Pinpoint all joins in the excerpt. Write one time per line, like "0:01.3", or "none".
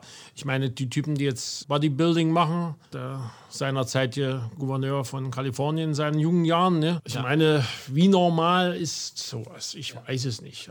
0:02.9

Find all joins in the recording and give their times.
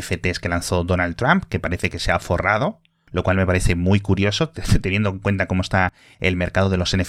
none

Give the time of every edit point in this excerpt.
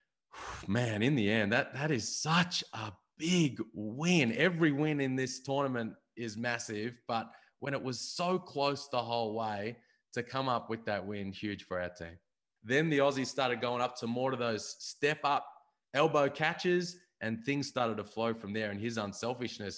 0:12.6
0:17.2

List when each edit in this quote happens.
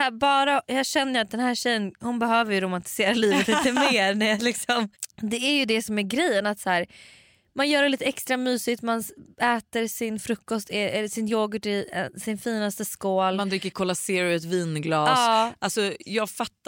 none

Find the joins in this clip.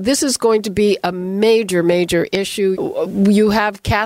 0:02.7

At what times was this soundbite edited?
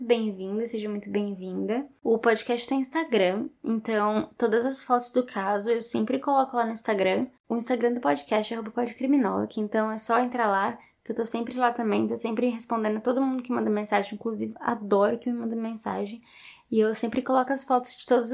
none

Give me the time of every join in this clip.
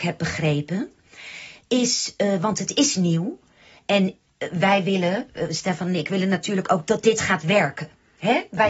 none

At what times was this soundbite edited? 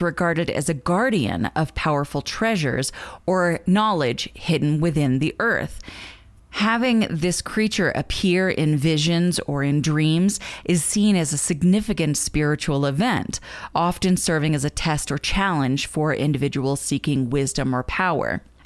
none

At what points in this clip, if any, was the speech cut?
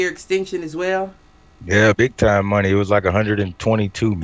0:01.9

